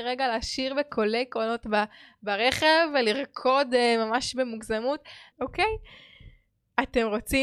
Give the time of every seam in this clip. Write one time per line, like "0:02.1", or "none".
0:05.3